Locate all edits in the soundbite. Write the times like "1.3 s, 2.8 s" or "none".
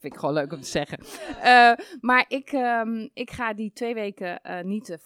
none